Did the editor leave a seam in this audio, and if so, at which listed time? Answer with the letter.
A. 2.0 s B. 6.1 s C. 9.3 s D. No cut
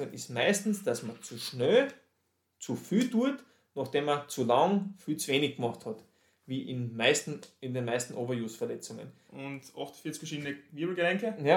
C